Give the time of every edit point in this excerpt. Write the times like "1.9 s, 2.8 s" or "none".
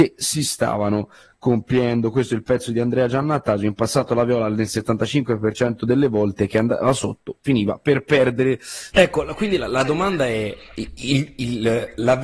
8.9 s

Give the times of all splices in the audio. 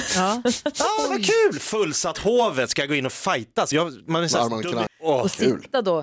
3.7 s, 4.9 s

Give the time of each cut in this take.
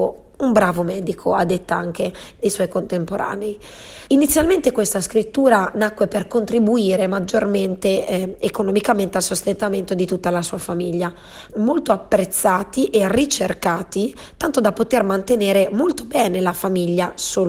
4.1 s, 11.5 s

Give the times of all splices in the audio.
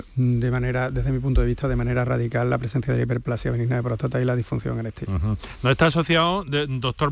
none

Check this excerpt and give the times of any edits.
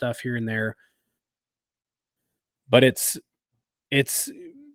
none

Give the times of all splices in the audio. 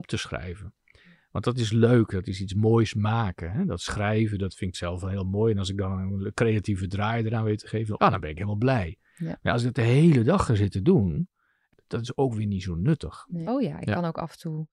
8.0 s, 13.5 s

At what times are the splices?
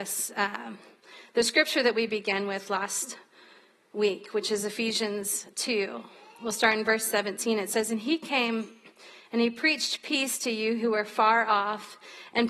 none

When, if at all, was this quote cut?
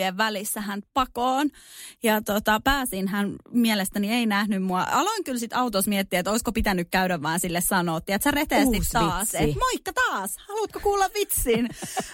none

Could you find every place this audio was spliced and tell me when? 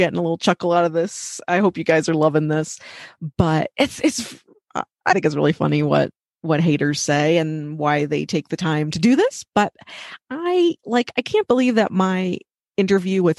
none

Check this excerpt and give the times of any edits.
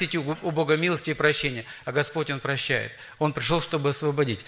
3.2 s

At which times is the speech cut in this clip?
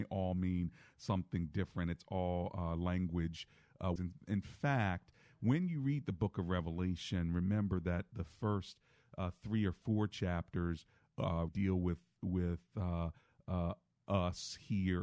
4.0 s, 11.5 s

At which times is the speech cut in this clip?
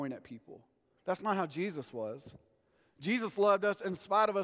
1.0 s

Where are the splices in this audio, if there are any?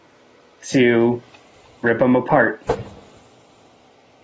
none

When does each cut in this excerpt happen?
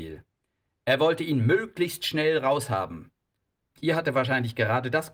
3.7 s

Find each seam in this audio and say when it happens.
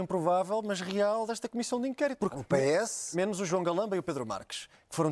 2.2 s

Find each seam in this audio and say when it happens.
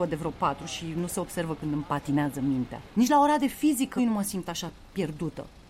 2.9 s, 4.0 s

